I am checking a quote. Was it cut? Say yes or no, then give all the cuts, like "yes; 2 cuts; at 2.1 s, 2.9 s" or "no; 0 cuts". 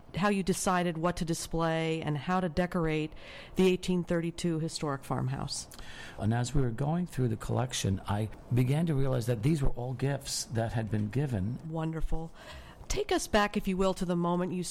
yes; 2 cuts; at 6.2 s, 11.6 s